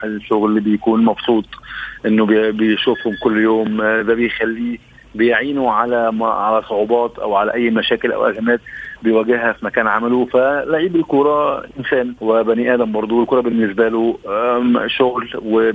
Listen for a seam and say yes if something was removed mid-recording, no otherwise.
yes